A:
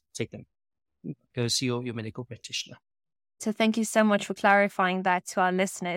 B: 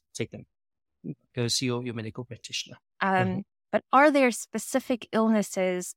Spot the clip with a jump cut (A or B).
B